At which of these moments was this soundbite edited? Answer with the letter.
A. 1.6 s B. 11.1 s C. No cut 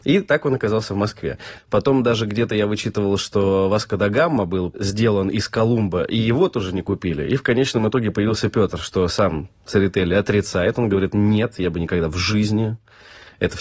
A